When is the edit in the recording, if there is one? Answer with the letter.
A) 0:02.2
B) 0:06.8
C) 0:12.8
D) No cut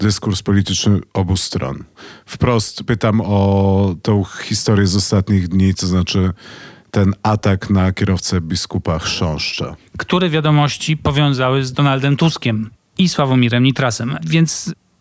D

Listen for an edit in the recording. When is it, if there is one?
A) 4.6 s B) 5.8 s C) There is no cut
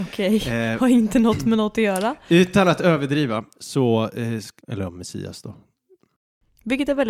A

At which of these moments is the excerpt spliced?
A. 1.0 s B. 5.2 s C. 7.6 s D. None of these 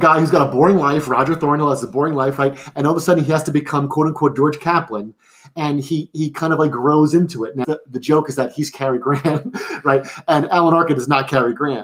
C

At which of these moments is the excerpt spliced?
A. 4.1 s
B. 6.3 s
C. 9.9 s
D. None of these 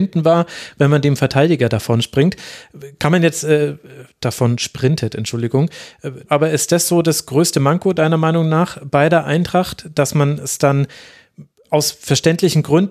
B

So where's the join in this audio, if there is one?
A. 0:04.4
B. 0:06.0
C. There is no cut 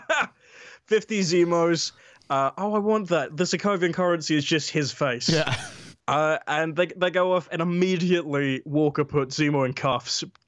B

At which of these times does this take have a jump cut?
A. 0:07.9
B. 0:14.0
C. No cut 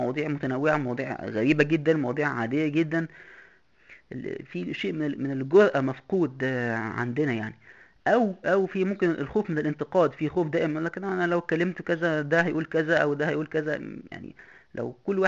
C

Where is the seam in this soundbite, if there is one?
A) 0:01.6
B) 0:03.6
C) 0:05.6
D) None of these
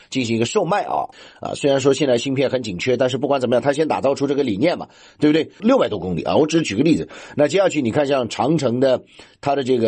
C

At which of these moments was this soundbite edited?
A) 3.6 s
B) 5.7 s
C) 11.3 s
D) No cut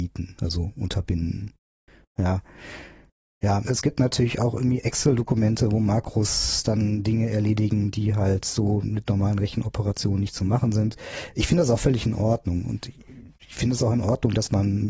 A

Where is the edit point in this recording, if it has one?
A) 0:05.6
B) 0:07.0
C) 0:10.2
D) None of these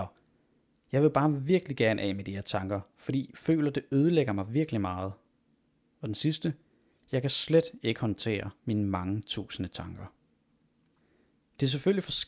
D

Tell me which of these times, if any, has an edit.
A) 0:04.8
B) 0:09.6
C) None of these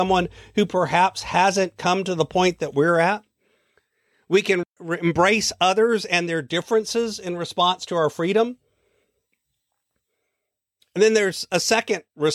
A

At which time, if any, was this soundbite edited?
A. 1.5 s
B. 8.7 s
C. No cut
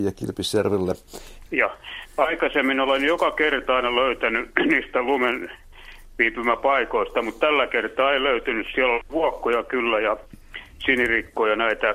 A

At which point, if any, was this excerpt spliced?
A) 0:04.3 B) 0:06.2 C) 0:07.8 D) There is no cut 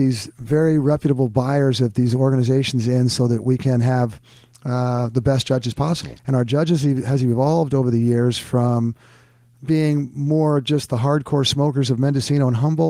B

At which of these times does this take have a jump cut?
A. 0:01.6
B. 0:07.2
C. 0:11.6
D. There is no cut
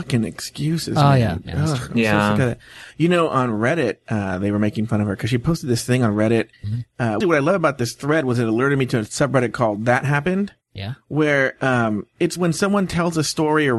B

